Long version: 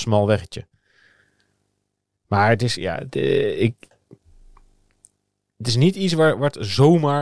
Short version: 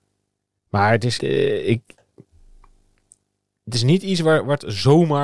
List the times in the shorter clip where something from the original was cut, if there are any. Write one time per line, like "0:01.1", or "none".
0:01.2